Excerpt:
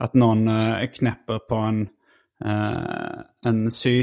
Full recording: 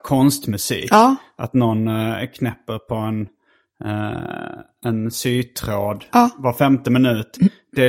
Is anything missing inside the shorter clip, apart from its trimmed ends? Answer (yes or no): no